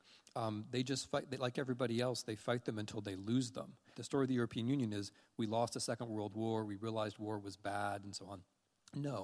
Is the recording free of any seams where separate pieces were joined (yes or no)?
no